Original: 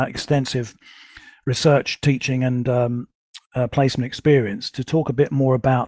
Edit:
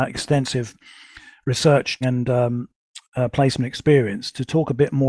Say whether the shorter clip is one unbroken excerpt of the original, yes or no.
no